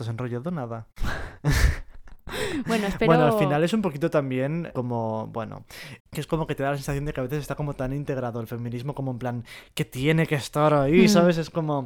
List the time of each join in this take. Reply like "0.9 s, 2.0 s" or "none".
4.7 s, 6.0 s